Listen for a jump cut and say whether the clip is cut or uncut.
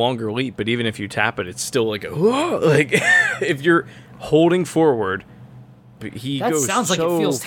cut